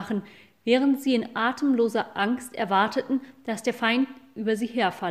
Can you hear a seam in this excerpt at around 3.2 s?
no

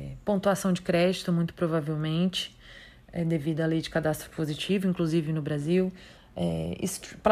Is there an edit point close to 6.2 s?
yes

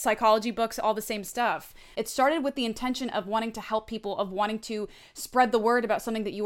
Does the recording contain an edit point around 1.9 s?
yes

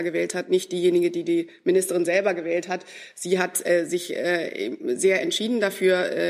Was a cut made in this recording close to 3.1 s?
no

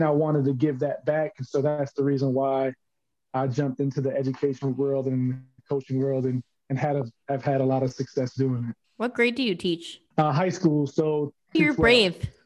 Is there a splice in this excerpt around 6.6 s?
no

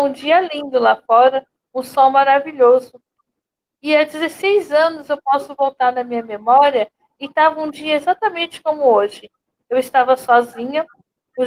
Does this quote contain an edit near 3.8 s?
no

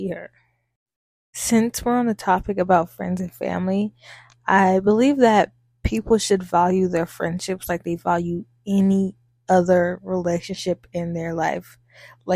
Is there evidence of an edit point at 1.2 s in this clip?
no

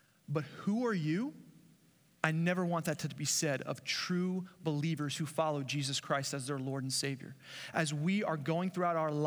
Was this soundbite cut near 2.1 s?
yes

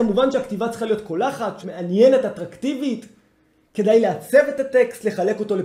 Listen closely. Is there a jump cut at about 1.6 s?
yes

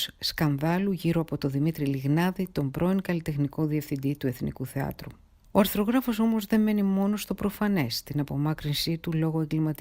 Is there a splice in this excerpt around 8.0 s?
no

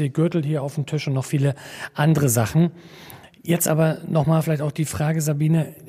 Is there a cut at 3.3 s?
no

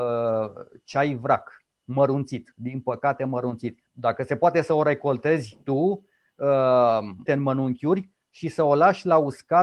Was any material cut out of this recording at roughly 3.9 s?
yes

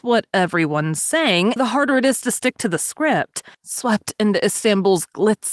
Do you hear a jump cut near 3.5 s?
yes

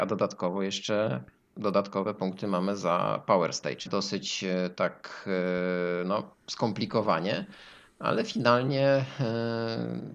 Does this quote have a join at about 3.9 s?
yes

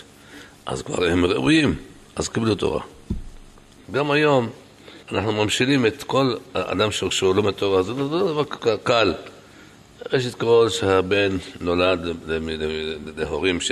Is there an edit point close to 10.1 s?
no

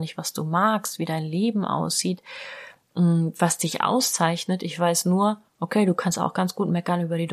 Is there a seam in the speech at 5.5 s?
yes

